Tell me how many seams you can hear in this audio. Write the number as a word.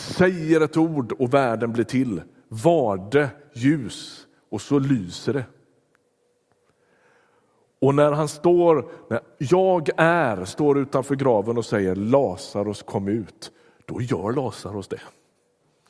zero